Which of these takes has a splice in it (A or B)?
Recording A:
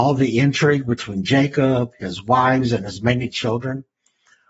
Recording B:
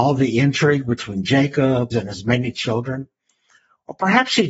B